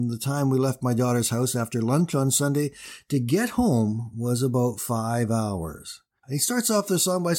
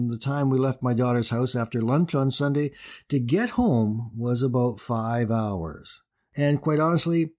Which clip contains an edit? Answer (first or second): first